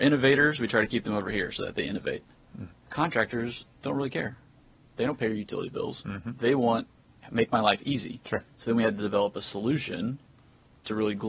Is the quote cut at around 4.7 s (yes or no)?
no